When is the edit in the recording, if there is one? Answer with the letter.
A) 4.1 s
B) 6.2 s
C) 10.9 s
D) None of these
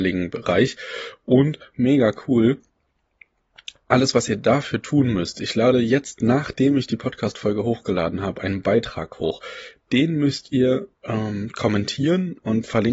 C